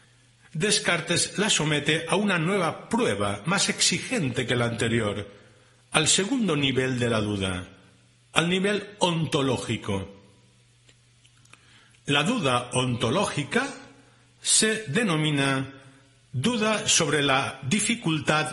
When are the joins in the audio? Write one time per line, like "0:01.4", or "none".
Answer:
none